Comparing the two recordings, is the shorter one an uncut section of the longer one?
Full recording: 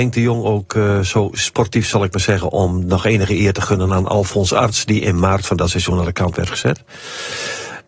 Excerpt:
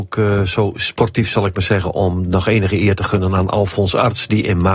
yes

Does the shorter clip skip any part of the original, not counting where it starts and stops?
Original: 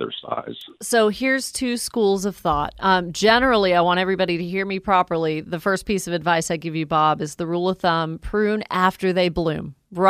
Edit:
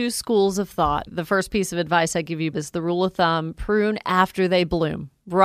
yes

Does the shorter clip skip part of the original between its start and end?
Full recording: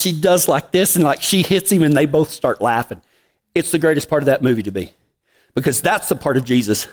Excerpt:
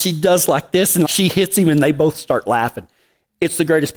yes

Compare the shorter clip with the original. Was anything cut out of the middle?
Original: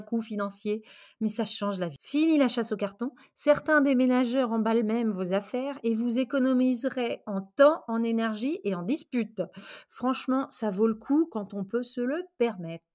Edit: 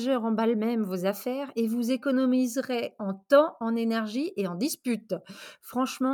no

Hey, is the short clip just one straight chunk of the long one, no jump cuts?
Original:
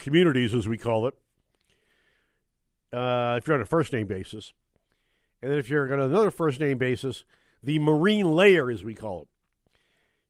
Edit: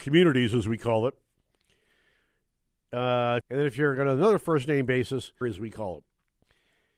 no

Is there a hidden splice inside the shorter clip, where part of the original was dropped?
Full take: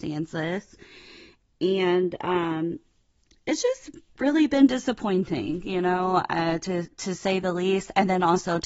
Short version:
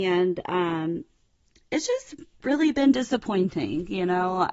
no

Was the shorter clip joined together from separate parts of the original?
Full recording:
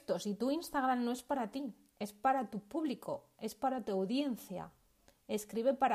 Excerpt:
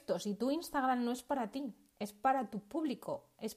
no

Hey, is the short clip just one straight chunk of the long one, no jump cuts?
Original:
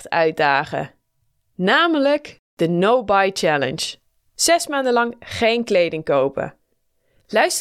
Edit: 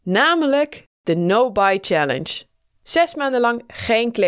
yes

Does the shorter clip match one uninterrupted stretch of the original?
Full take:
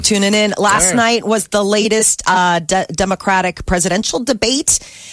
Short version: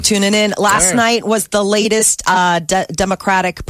yes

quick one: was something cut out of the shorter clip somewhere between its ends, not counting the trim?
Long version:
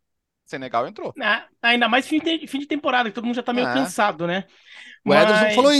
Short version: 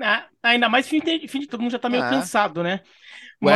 yes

